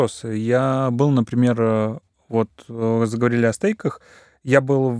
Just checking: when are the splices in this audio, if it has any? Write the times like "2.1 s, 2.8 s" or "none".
none